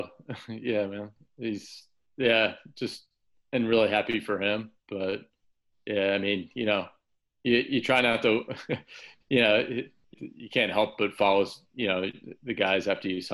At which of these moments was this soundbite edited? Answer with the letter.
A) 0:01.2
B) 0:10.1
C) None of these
B